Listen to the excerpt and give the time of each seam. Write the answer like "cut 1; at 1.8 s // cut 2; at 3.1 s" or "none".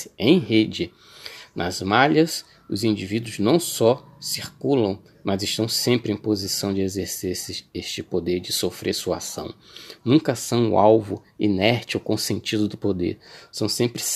none